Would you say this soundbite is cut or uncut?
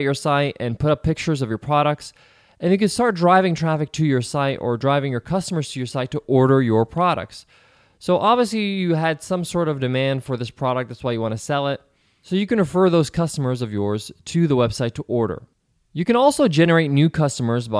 uncut